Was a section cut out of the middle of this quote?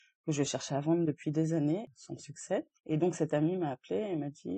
yes; 1 cut; at 2.8 s

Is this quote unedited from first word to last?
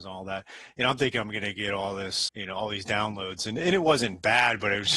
no; 1 cut; at 2.3 s

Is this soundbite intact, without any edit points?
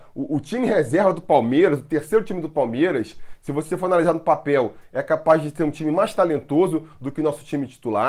yes; 0 cuts

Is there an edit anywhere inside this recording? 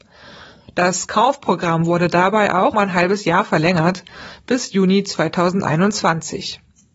yes; 1 cut; at 2.7 s

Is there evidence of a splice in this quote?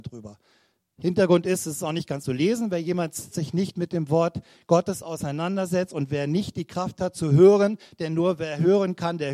yes; 2 cuts; at 2.2 s, 3.3 s

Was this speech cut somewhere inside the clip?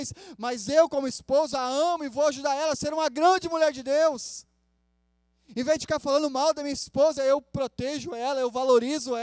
no; 0 cuts

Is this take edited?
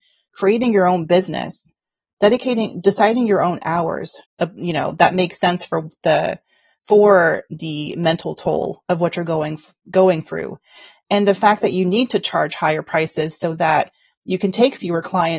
yes; 1 cut; at 4.2 s

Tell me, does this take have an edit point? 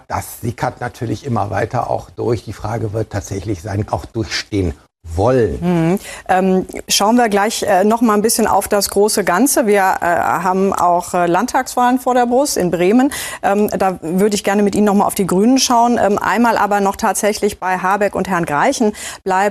yes; 1 cut; at 3.9 s

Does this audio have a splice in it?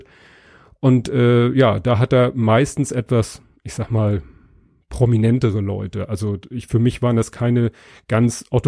no; 0 cuts

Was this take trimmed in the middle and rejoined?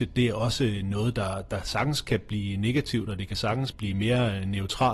yes; 1 cut; at 3.7 s

